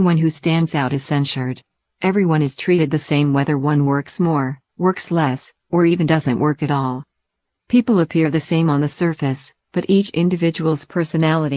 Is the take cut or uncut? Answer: uncut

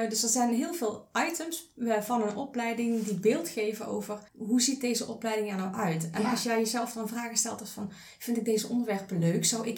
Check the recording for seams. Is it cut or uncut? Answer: cut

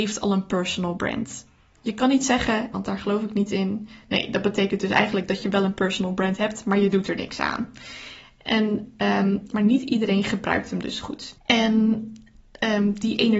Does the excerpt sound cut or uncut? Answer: cut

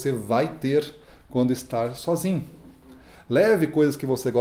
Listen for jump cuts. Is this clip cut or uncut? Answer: uncut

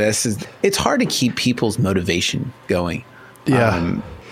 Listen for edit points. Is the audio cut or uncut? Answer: uncut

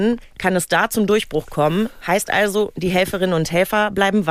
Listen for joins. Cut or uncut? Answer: uncut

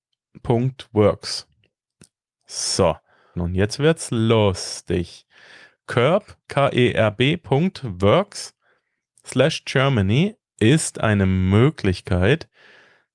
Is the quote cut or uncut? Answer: cut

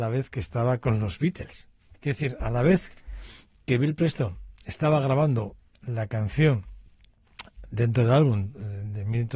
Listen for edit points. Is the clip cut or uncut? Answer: cut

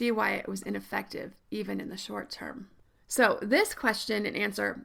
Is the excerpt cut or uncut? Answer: uncut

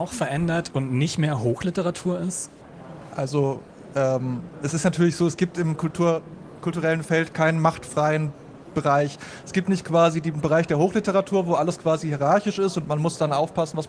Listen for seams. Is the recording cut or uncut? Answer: uncut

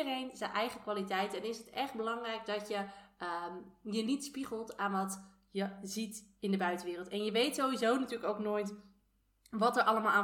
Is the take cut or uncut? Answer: uncut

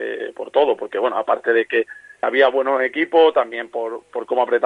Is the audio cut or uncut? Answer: cut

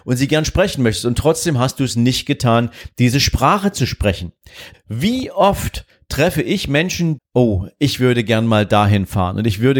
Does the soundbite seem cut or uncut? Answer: cut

